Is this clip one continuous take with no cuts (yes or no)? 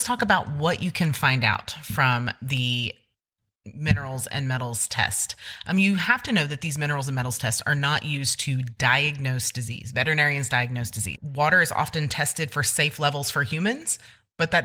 no